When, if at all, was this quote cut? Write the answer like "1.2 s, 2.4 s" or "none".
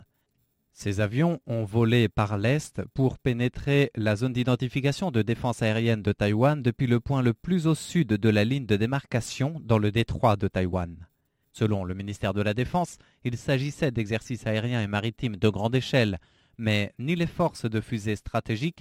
11.4 s

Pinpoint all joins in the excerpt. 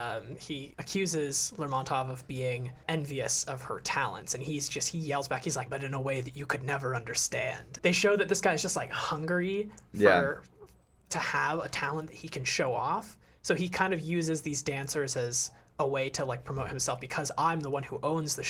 5.7 s

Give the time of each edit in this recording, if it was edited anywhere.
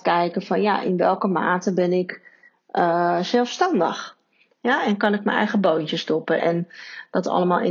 6.4 s

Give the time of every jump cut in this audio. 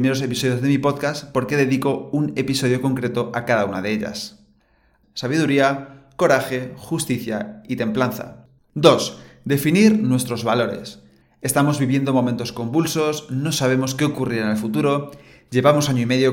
5.0 s, 8.6 s, 11.2 s

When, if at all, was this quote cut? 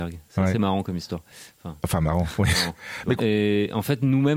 3.2 s

